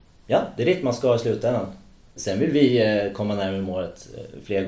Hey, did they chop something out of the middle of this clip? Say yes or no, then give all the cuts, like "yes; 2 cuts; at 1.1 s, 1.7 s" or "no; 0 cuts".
yes; 1 cut; at 2.2 s